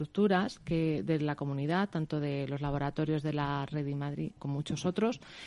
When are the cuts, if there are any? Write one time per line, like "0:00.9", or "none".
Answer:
0:04.4